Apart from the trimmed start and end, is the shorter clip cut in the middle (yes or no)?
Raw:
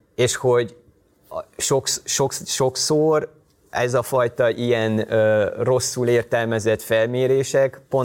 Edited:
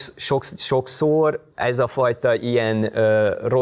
yes